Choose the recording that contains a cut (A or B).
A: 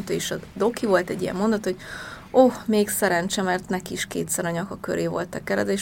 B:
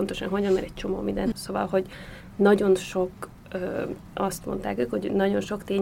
B